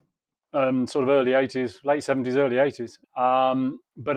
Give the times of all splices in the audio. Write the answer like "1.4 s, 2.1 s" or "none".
3.0 s